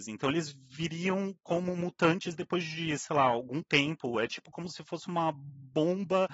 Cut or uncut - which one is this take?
uncut